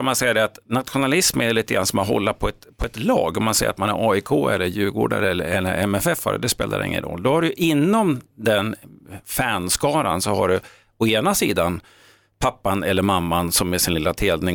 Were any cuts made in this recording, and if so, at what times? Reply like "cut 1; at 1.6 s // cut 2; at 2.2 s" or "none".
none

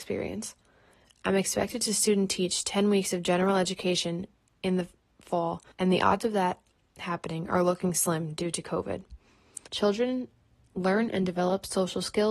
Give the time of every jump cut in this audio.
cut 1; at 5.7 s // cut 2; at 9.7 s

